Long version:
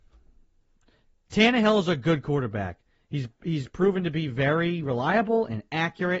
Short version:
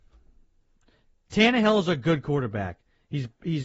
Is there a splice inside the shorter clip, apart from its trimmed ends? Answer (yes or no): no